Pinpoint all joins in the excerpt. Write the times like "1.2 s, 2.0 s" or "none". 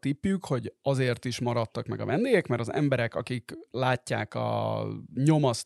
none